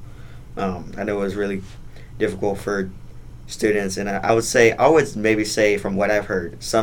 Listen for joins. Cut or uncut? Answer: uncut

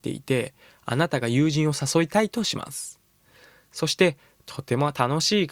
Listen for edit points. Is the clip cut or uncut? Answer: uncut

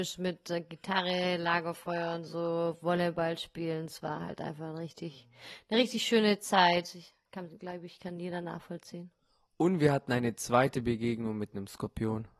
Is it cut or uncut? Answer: uncut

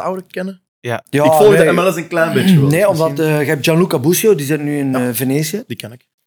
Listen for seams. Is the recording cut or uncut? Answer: uncut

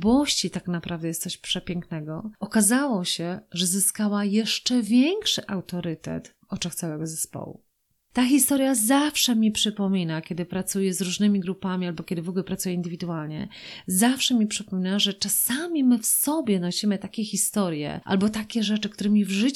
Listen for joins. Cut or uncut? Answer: uncut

